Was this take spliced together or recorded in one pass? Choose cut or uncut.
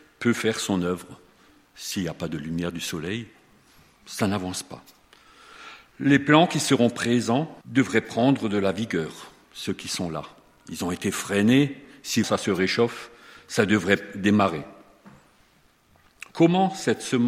cut